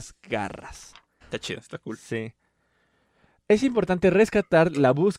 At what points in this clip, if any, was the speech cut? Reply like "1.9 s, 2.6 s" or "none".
1.2 s